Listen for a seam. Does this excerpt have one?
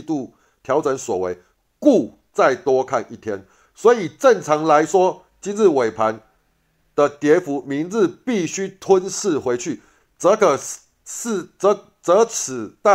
no; 0 cuts

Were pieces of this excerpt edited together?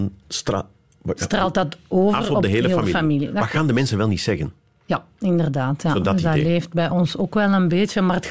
no; 0 cuts

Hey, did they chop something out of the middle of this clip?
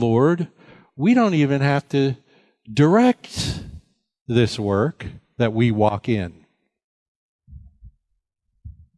no; 0 cuts

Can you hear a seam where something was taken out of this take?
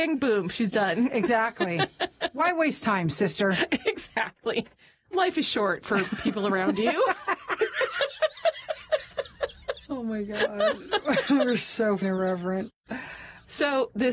no; 0 cuts

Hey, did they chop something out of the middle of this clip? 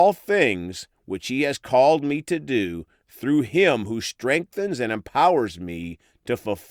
no; 0 cuts

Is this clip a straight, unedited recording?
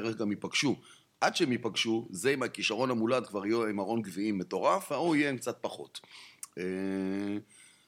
yes; 0 cuts

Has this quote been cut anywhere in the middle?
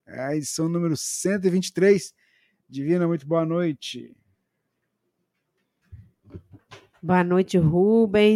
no; 0 cuts

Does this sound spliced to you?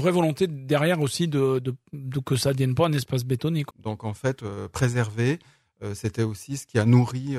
yes; 1 cut; at 3.7 s

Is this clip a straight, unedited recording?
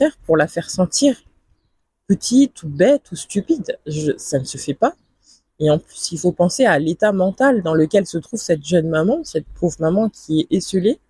yes; 0 cuts

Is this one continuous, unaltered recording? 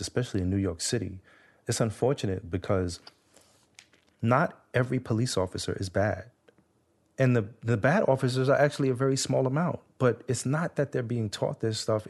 yes; 0 cuts

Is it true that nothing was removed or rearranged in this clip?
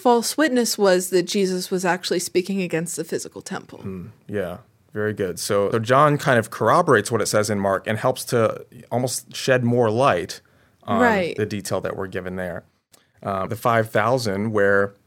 no; 2 cuts; at 5.7 s, 13.5 s

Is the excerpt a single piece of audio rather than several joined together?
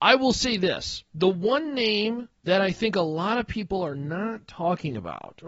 no; 2 cuts; at 1.1 s, 2.4 s

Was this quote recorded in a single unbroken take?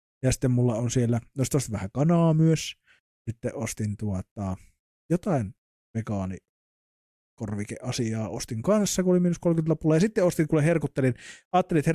yes; 0 cuts

